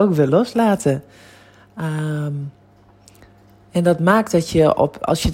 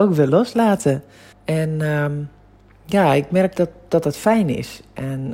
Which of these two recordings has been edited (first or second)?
second